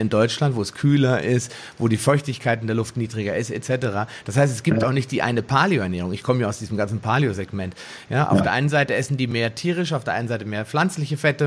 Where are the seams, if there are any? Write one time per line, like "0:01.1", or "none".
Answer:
none